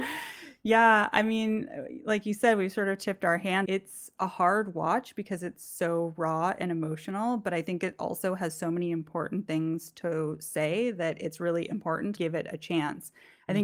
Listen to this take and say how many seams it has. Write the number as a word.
two